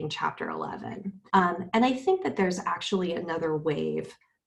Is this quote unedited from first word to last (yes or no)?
no